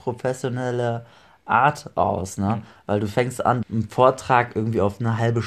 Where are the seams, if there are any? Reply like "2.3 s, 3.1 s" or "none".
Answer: 3.6 s